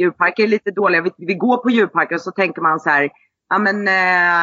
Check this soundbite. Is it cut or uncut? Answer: uncut